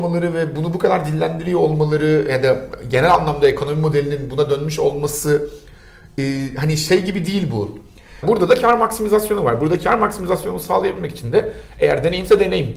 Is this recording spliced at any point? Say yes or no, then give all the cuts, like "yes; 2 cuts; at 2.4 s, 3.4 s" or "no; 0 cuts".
yes; 1 cut; at 8.2 s